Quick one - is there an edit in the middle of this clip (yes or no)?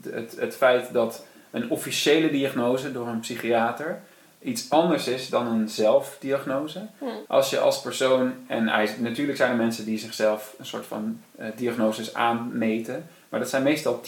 yes